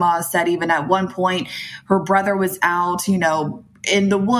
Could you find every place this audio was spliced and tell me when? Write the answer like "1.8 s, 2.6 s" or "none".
none